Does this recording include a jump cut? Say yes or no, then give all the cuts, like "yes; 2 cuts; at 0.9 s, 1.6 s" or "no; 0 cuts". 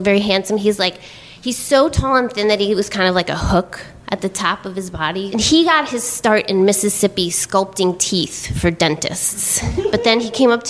yes; 1 cut; at 5.3 s